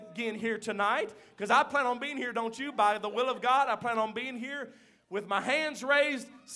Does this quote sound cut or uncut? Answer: uncut